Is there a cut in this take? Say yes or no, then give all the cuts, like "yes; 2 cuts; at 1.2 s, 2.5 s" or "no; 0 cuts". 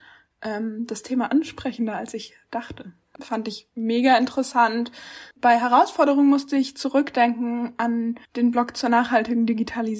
yes; 3 cuts; at 3.2 s, 5.3 s, 8.3 s